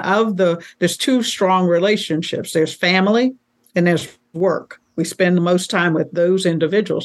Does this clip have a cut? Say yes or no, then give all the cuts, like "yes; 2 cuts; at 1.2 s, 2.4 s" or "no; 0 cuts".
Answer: no; 0 cuts